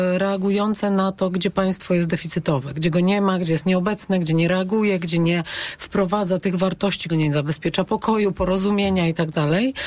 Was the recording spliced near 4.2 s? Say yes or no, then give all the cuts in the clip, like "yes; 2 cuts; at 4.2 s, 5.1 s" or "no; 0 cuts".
no; 1 cut; at 7.1 s